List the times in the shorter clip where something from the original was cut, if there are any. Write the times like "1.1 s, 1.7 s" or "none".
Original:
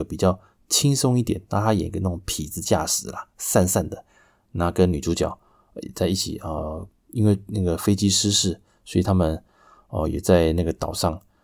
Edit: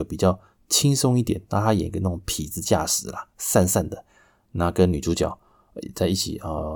none